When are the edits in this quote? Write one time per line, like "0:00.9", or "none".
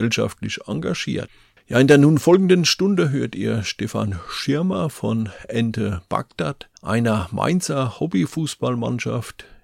0:01.6
0:06.8